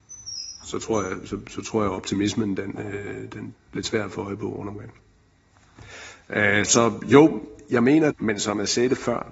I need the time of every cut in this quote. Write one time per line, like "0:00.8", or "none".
0:03.5
0:06.6
0:08.1